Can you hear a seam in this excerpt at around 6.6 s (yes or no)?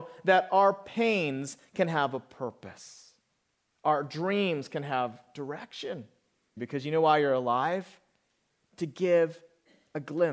yes